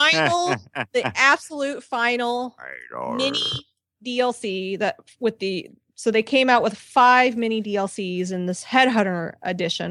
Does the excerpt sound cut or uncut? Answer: uncut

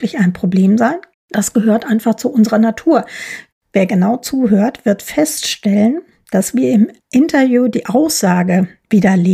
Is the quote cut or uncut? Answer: cut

